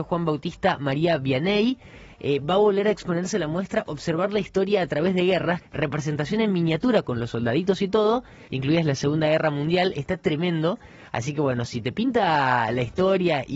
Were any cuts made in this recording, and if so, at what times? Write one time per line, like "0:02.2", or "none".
0:05.6
0:08.5